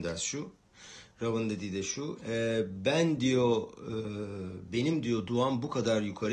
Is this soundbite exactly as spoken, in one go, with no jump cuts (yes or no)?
no